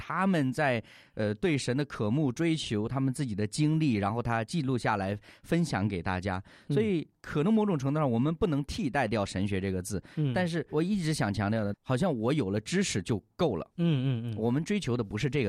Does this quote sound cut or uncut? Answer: cut